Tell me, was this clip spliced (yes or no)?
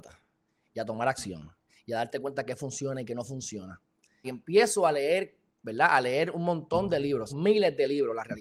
yes